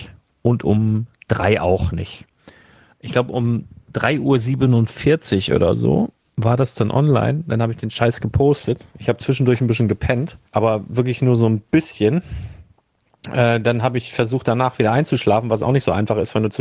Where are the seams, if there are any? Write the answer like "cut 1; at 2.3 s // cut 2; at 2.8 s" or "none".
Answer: cut 1; at 10.5 s

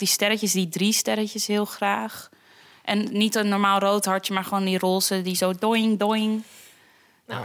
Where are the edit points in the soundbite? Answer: none

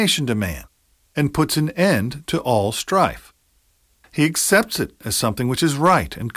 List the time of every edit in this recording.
cut 1; at 4.0 s

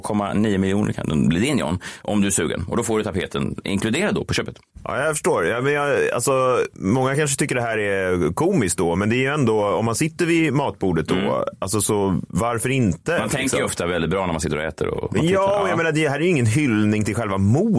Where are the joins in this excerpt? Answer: none

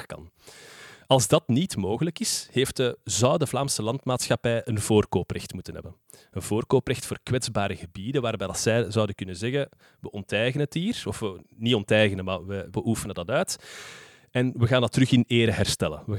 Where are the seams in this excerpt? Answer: cut 1; at 12.7 s

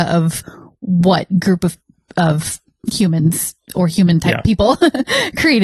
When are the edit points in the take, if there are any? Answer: none

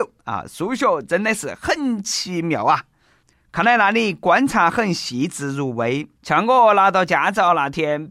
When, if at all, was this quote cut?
cut 1; at 6.2 s

